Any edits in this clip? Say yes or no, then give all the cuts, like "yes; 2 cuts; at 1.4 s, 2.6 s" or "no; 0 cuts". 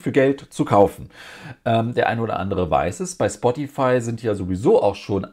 no; 0 cuts